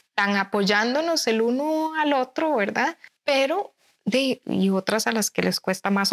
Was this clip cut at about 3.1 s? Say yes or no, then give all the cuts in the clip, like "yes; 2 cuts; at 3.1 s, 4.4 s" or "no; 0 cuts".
no; 1 cut; at 4.4 s